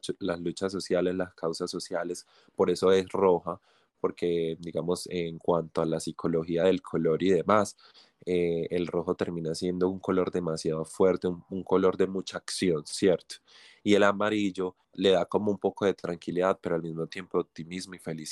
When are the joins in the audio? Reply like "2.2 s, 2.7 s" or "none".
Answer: none